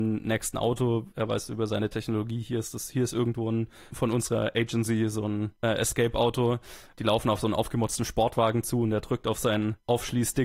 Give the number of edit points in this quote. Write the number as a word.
zero